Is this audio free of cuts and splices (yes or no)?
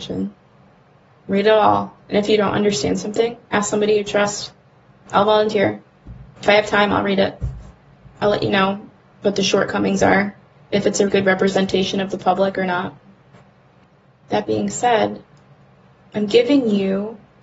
no